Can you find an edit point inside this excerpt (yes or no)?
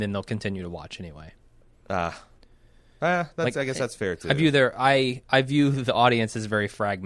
no